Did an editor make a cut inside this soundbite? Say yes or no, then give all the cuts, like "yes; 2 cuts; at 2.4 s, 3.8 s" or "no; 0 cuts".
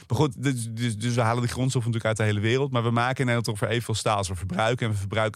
no; 0 cuts